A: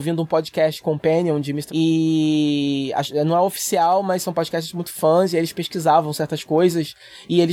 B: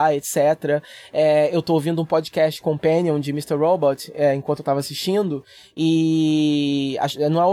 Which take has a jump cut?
A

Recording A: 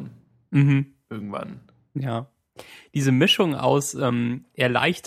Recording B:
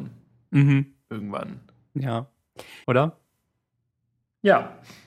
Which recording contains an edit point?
B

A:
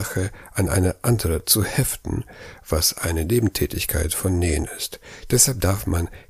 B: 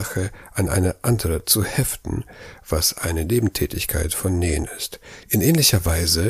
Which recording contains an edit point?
B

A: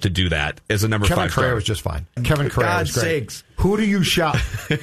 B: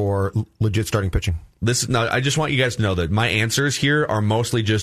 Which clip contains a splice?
A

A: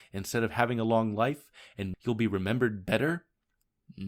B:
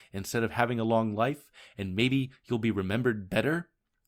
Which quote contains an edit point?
A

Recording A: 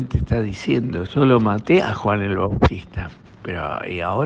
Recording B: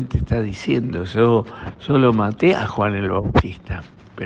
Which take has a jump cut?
A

